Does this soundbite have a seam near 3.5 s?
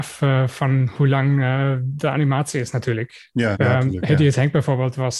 yes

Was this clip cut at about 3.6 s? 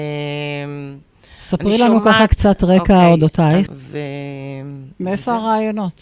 yes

